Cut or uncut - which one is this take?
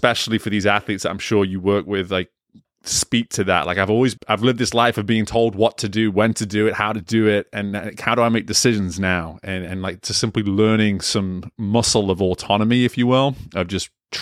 cut